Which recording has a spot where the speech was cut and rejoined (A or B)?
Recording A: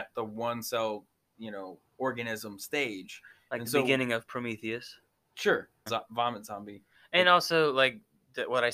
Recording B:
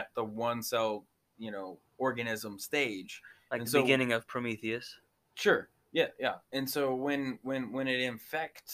A